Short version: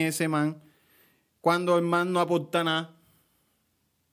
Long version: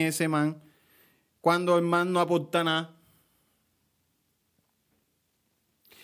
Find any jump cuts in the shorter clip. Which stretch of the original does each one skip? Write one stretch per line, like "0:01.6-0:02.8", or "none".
none